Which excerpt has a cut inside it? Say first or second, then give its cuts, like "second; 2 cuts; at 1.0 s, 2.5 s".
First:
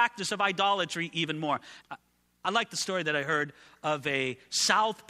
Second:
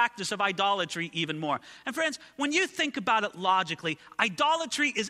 first; 1 cut; at 1.8 s